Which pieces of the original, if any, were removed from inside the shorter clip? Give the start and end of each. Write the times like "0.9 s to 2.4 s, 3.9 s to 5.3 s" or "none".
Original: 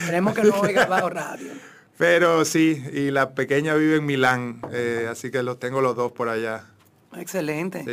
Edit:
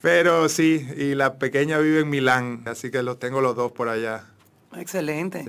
4.6 s to 5.1 s